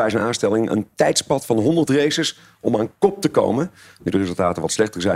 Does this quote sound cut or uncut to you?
uncut